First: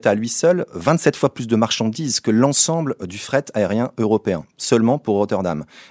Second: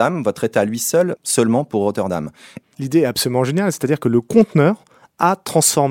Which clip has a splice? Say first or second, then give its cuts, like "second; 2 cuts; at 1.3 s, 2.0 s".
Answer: second; 2 cuts; at 1.2 s, 2.6 s